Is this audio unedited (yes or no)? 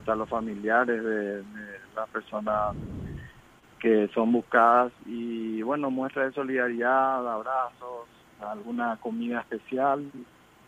yes